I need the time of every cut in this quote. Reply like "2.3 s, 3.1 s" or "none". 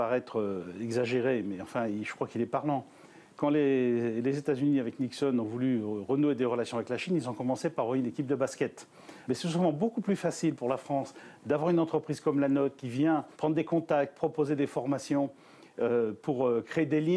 9.2 s, 13.3 s